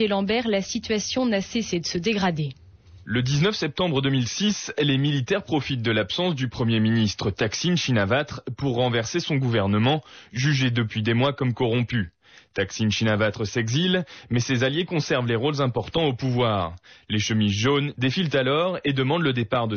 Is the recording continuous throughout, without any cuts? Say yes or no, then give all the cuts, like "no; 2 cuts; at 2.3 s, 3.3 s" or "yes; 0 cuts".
no; 1 cut; at 17.9 s